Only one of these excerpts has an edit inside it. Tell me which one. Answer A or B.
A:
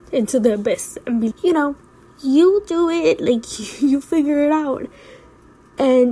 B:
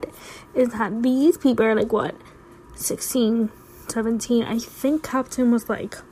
A